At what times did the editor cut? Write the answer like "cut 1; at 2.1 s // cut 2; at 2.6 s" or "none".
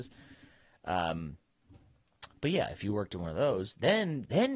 none